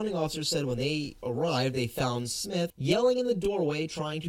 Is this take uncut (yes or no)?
no